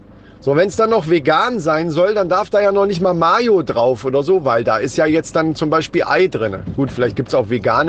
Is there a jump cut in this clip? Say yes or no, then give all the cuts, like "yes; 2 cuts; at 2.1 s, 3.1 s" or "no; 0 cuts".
no; 0 cuts